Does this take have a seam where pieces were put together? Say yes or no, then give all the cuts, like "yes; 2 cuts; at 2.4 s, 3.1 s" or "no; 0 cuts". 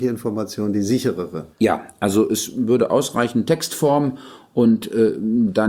yes; 1 cut; at 1.5 s